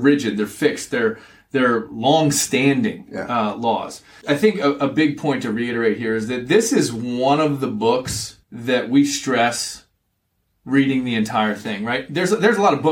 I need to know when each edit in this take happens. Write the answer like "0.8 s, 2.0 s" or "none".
4.2 s, 8.4 s

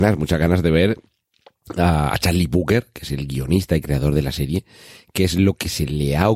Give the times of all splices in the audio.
none

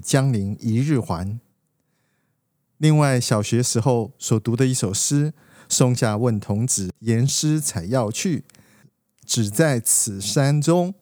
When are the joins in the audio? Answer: none

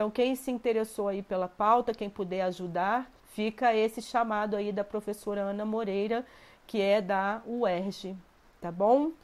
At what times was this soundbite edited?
3.2 s

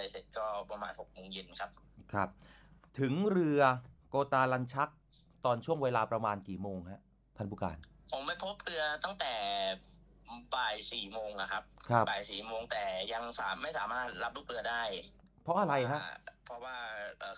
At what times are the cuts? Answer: none

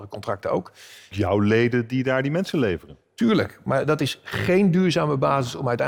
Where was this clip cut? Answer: 1.1 s

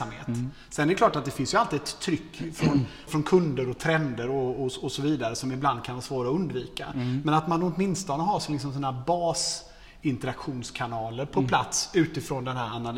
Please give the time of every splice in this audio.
3.1 s

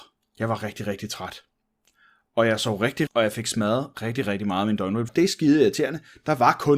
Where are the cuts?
3.1 s, 5.1 s

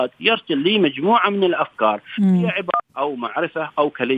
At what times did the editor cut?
2.9 s

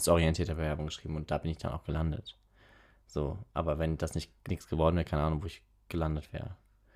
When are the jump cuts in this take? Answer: none

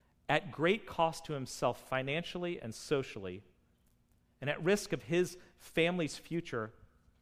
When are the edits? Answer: none

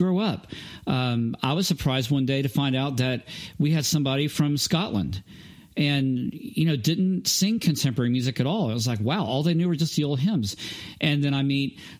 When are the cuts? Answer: none

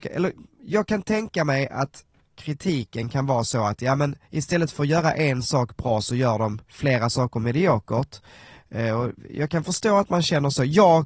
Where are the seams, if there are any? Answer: 4.2 s, 6.6 s

